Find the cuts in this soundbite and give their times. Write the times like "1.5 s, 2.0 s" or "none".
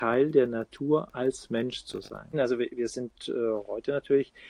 2.3 s